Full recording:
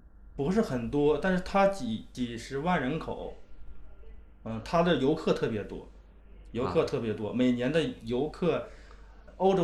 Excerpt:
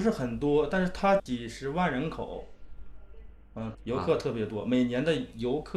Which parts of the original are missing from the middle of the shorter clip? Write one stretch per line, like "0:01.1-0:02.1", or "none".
0:01.7-0:02.1
0:04.6-0:06.4